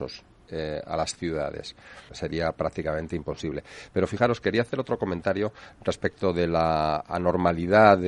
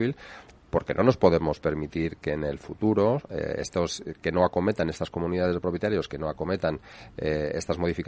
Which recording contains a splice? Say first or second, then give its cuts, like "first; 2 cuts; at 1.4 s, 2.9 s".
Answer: first; 1 cut; at 2.1 s